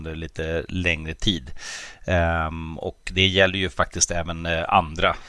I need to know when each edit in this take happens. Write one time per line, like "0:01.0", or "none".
none